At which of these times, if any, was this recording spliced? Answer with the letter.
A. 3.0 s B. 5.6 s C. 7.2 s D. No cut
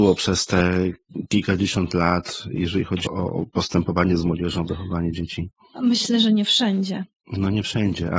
A